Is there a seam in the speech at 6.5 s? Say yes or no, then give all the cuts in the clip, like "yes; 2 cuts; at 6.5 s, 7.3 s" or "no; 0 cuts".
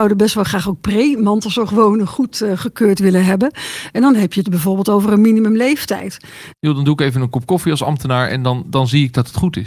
yes; 1 cut; at 6.5 s